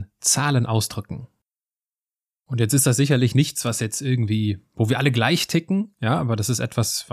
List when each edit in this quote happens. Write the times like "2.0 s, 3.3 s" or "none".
2.3 s